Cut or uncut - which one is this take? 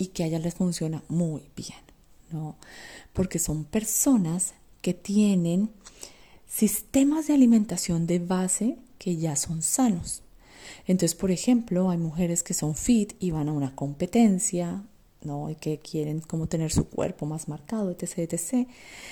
uncut